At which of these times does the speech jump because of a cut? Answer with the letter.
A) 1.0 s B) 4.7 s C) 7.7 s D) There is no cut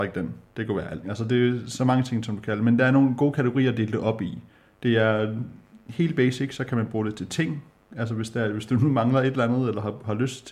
A